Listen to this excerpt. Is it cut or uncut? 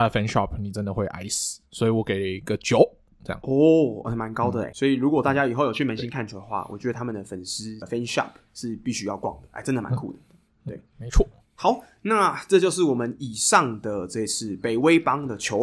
uncut